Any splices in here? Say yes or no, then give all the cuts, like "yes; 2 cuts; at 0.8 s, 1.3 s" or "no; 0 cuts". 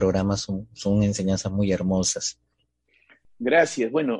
no; 0 cuts